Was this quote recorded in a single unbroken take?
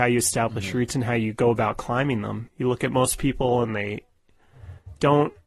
no; 1 cut; at 2.5 s

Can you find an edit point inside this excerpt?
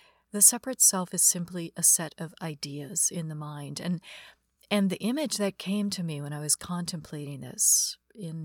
no; 0 cuts

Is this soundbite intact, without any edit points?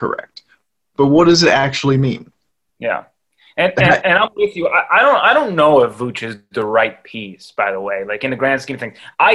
yes; 0 cuts

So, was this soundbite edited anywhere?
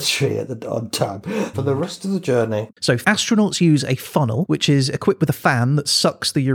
yes; 2 cuts; at 1.5 s, 2.7 s

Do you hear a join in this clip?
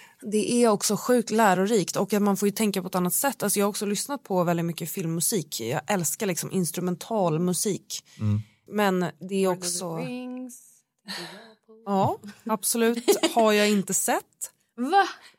yes; 1 cut; at 8.7 s

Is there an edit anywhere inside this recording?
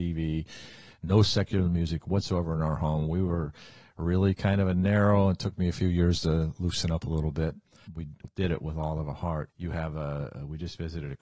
yes; 2 cuts; at 7.9 s, 9.5 s

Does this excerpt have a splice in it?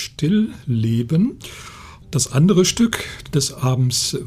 yes; 1 cut; at 2.0 s

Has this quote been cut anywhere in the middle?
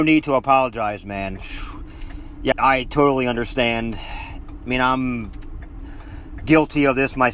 yes; 1 cut; at 2.5 s

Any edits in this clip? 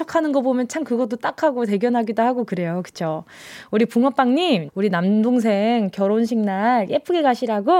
yes; 1 cut; at 4.7 s

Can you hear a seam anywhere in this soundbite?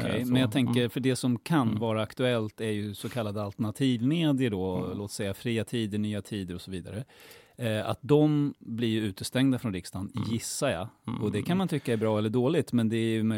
no; 0 cuts

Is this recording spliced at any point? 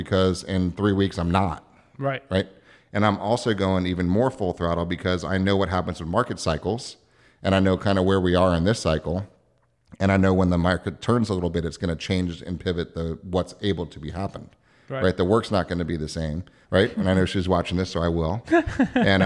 yes; 1 cut; at 16.6 s

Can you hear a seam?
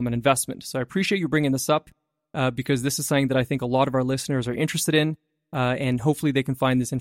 no; 0 cuts

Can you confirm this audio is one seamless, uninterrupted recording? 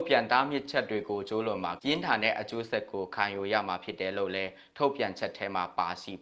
no; 1 cut; at 1.8 s

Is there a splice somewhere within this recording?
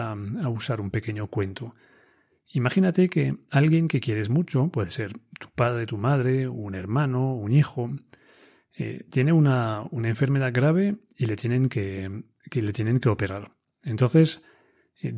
no; 0 cuts

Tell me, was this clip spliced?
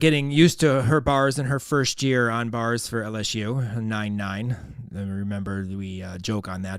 no; 0 cuts

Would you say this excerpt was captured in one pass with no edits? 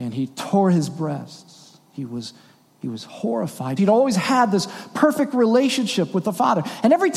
no; 1 cut; at 3.8 s

